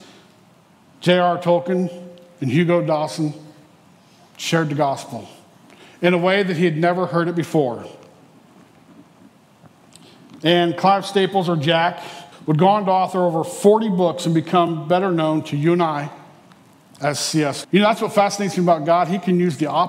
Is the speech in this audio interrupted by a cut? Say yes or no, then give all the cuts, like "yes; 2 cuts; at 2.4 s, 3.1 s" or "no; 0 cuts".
yes; 2 cuts; at 12.3 s, 17.6 s